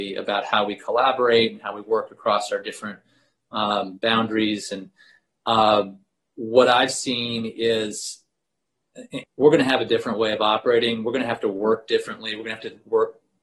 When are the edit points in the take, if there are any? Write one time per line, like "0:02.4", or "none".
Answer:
0:09.2